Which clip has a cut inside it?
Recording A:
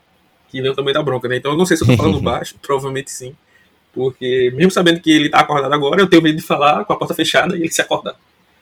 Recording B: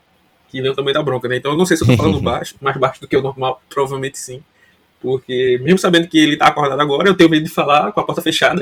A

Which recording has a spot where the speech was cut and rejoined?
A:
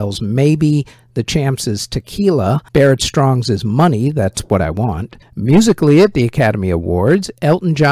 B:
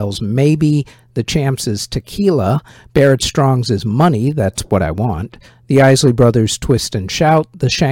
A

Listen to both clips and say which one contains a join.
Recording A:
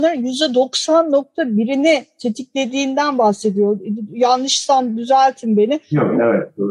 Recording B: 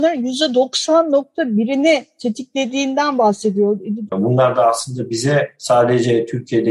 B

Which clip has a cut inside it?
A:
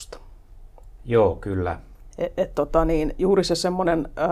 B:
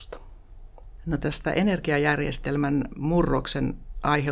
A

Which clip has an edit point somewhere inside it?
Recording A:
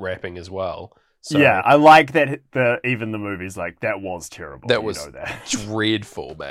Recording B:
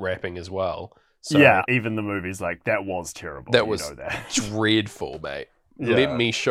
B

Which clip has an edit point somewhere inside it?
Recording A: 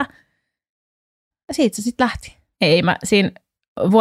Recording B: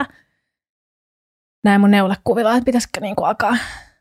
A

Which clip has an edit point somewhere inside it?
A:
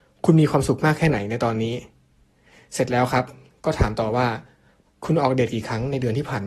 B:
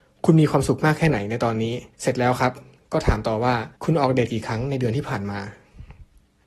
B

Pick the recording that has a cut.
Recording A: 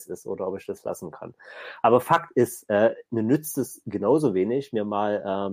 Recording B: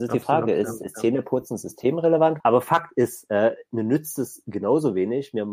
B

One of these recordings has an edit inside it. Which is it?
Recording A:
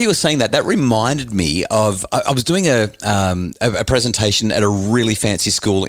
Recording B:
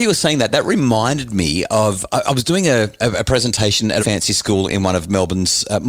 B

